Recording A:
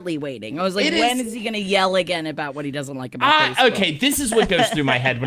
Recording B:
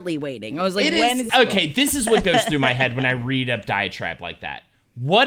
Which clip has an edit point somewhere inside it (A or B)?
B